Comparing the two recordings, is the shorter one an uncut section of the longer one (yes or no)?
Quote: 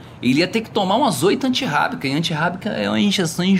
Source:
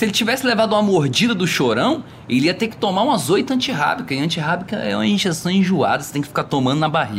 yes